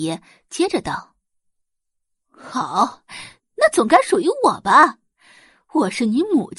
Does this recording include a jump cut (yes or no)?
yes